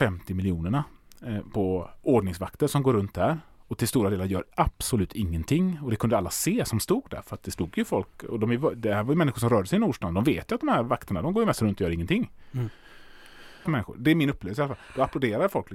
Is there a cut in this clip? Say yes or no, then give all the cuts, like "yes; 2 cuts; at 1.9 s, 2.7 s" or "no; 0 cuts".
yes; 1 cut; at 13.7 s